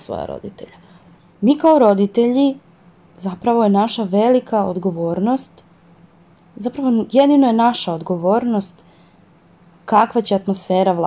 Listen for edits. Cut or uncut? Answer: cut